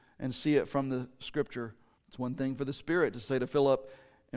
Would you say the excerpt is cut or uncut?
cut